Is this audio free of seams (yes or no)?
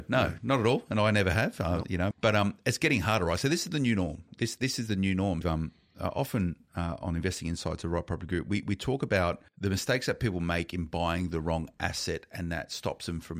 no